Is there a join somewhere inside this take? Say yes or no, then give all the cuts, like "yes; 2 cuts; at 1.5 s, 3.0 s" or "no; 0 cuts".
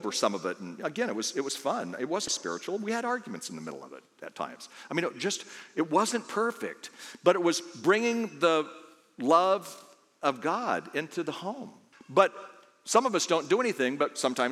yes; 2 cuts; at 2.3 s, 11.9 s